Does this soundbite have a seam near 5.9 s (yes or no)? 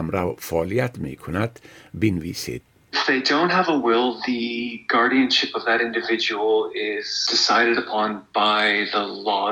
no